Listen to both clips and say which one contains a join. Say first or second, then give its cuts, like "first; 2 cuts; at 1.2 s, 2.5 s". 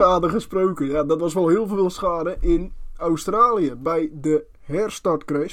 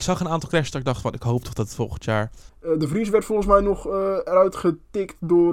second; 1 cut; at 2.5 s